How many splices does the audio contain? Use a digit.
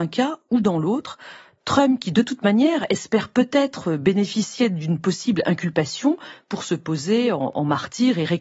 0